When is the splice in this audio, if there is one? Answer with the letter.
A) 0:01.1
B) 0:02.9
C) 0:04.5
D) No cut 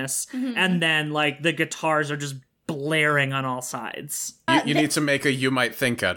C